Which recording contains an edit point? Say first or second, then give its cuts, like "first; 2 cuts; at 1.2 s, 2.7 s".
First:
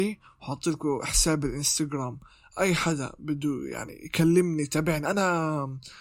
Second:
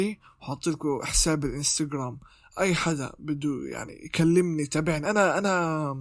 first; 1 cut; at 5.1 s